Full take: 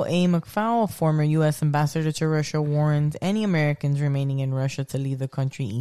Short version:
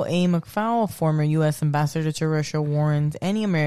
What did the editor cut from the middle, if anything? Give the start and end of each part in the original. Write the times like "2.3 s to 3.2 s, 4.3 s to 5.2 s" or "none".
none